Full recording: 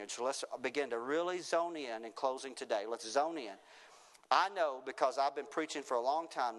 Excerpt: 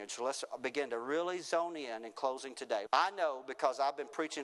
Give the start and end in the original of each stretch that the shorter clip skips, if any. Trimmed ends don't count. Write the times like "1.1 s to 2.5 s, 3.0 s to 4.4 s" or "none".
2.9 s to 4.2 s